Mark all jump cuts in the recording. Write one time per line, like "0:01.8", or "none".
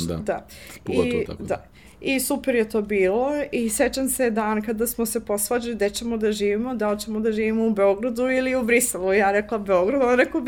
none